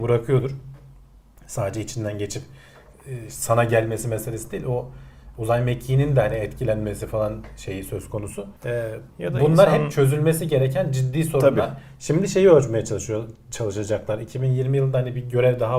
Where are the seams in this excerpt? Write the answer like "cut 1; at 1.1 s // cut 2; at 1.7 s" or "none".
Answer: cut 1; at 8.6 s